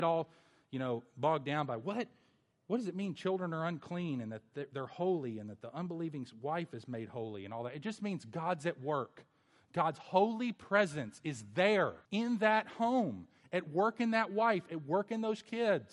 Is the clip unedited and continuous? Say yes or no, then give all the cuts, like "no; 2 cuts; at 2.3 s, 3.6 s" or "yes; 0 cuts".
no; 1 cut; at 12.1 s